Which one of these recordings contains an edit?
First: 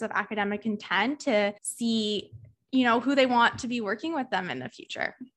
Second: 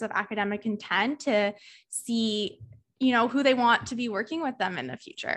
first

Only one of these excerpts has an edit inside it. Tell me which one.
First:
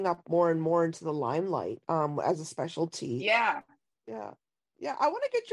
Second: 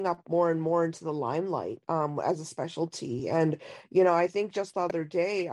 first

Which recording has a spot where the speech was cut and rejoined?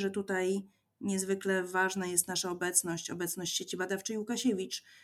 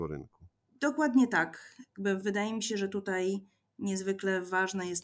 second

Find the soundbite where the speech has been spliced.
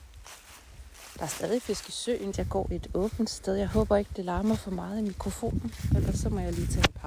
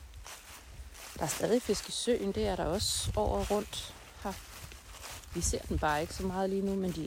first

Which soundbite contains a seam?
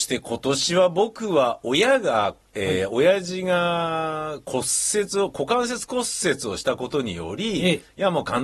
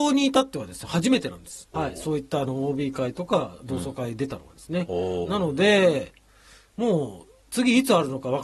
second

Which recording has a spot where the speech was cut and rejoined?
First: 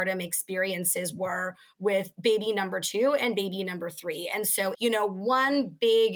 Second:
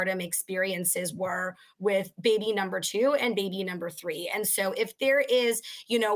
first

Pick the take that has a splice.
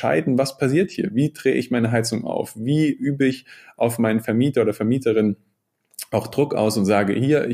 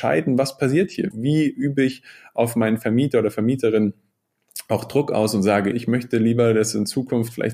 second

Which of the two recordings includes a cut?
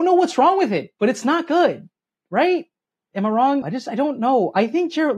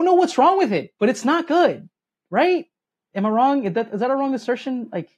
first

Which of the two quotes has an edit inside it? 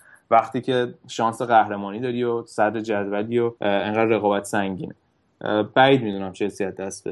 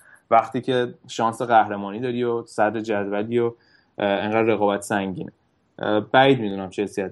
first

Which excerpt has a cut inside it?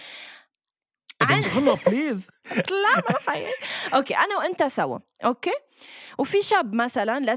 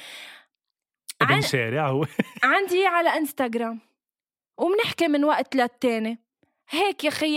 first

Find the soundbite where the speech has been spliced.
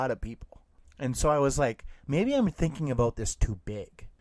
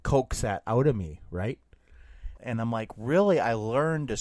second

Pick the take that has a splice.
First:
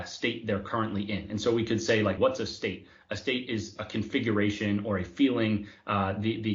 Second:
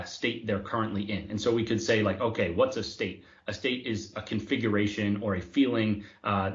first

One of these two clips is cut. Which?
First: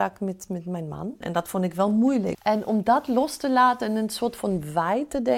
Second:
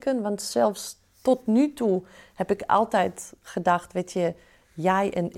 first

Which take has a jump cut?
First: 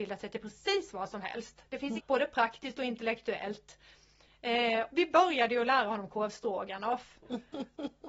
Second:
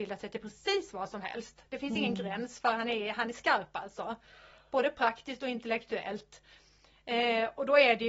first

